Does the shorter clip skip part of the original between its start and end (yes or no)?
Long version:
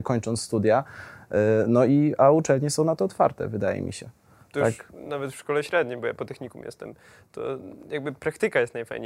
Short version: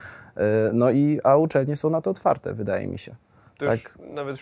no